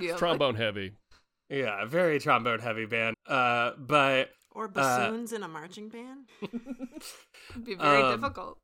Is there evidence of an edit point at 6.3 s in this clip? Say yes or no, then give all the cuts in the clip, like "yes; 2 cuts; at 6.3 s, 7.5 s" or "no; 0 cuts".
yes; 2 cuts; at 3.1 s, 6.3 s